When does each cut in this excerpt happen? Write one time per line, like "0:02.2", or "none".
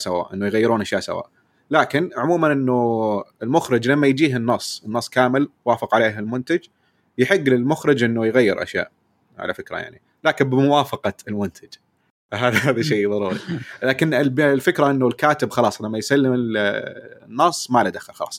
none